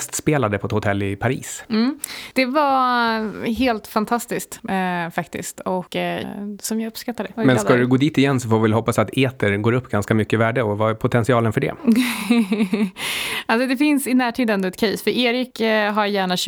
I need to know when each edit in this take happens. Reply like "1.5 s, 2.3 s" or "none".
6.2 s